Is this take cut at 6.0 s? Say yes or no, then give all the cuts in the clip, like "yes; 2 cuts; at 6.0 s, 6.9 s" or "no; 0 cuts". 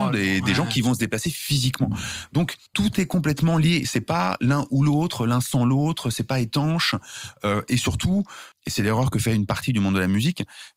no; 2 cuts; at 2.7 s, 8.5 s